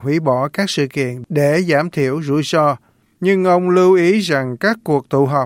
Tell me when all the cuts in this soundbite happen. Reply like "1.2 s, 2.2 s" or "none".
none